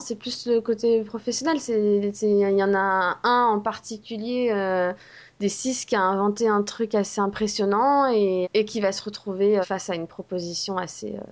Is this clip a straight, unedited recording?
no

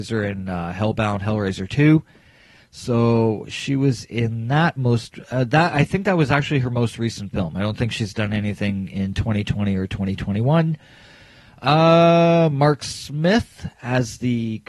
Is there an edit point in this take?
no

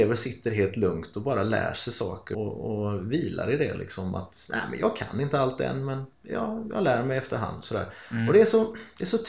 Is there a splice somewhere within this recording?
yes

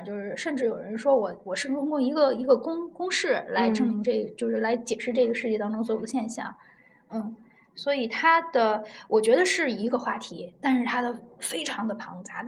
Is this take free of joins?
yes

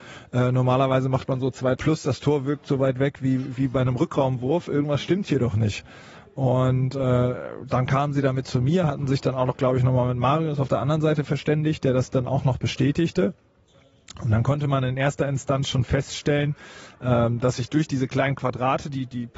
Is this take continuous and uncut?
no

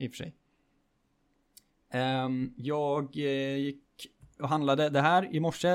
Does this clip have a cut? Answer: no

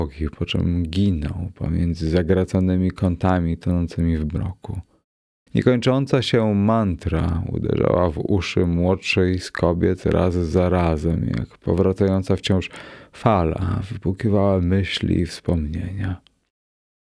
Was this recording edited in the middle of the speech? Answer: yes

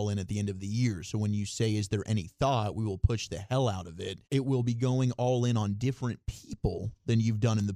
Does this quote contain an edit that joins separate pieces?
yes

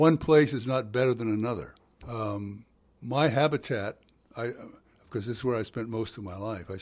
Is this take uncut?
no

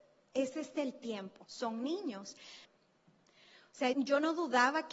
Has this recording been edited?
yes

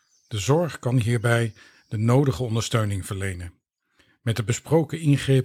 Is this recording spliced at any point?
no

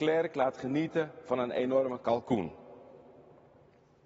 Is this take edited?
no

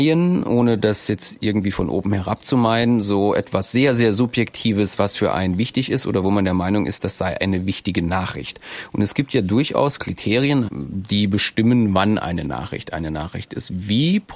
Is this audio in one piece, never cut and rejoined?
no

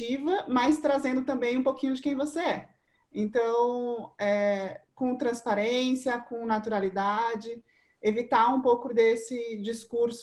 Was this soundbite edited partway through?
no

